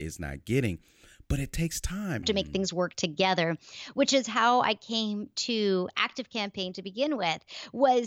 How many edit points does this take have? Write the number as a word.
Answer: one